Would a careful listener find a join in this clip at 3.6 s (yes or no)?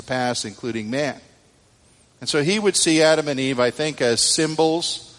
no